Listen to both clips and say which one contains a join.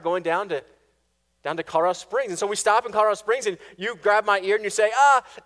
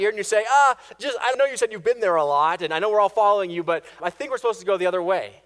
second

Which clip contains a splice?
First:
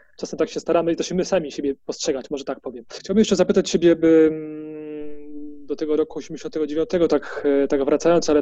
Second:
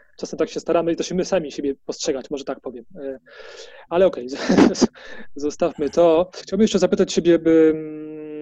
first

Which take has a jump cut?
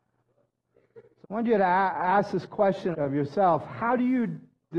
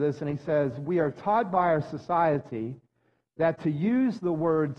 first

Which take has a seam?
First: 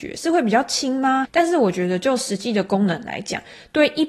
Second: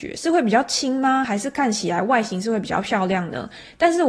first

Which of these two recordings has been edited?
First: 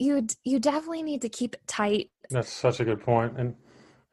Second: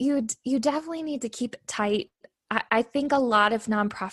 first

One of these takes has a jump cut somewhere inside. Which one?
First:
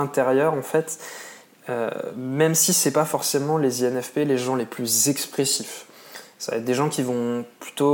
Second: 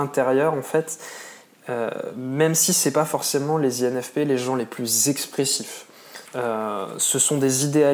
second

